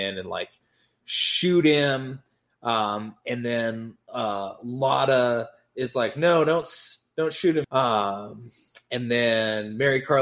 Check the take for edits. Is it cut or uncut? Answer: cut